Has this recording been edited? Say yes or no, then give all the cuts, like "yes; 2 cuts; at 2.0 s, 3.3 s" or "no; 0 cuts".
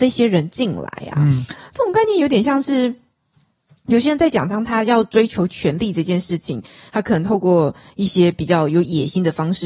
no; 0 cuts